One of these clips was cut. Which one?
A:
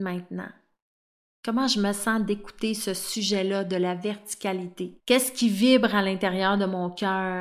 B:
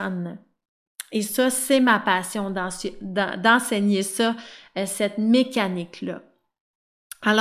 A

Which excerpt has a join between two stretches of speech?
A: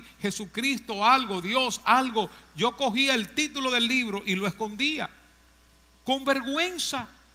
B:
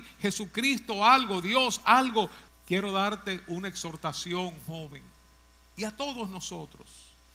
B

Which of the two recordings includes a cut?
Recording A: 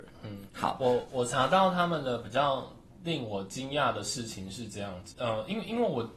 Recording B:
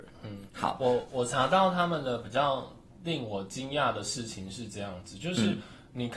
A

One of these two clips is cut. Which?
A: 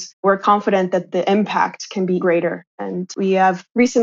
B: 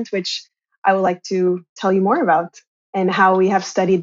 A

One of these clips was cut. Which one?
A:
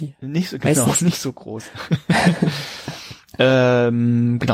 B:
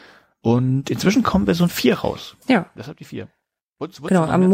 B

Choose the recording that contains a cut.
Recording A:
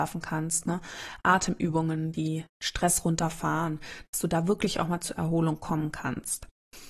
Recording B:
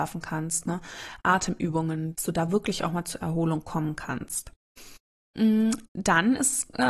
B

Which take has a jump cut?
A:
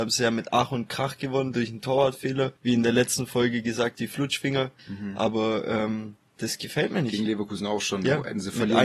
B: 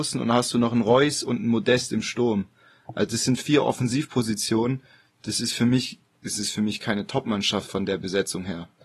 A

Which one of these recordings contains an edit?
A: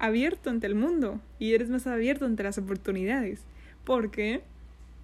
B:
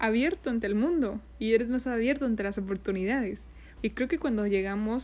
B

